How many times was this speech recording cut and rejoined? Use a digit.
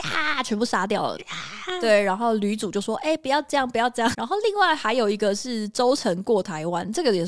1